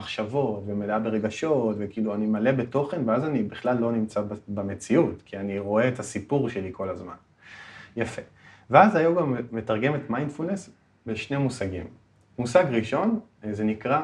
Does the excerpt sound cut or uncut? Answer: uncut